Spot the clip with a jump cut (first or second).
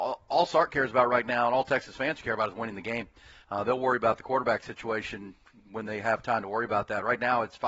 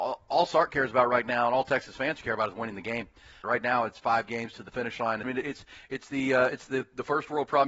second